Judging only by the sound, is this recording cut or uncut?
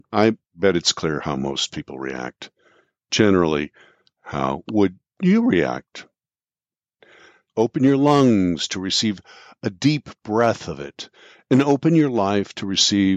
cut